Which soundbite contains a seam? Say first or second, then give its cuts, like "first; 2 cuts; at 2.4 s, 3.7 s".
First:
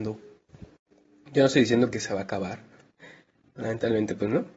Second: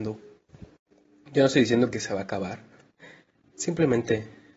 second; 1 cut; at 3.5 s